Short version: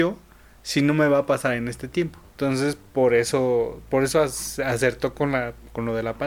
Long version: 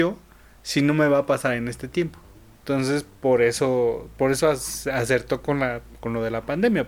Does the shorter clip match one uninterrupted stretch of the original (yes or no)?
no